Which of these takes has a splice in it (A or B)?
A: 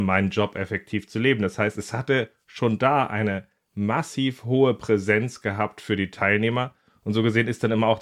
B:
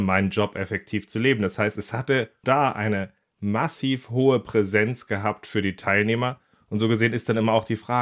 B